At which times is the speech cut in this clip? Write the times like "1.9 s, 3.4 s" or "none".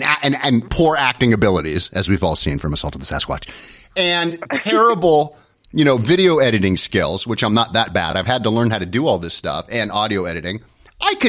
none